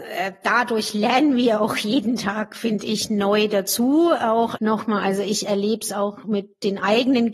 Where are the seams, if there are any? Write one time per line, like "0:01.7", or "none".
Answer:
0:04.6